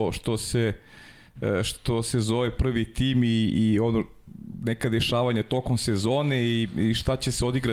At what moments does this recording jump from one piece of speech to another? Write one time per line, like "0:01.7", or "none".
none